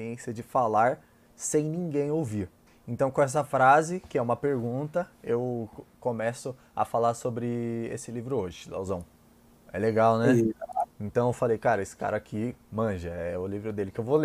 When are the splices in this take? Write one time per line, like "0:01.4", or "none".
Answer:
0:02.7
0:09.7
0:10.9